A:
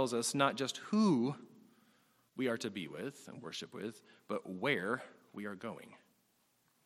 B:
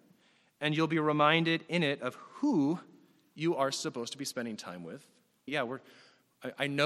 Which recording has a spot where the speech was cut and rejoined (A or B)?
B